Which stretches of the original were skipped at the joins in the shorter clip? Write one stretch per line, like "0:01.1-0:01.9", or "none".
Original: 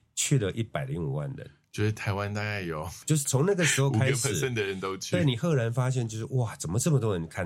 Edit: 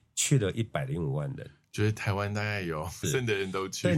0:03.0-0:04.3